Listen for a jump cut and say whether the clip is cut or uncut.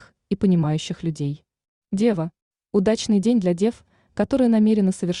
cut